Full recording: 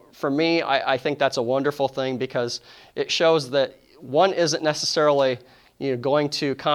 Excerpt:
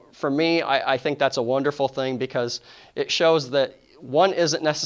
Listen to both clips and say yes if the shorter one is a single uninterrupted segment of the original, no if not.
yes